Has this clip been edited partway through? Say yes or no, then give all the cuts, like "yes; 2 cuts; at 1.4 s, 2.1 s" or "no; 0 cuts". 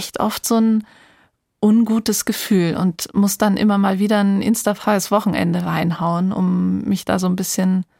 no; 0 cuts